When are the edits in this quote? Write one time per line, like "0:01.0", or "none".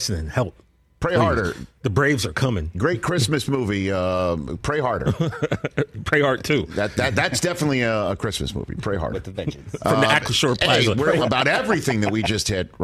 0:11.2